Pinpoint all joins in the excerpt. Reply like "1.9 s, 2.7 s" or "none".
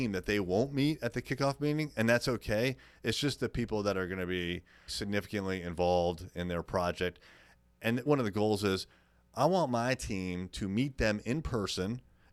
4.9 s, 8.1 s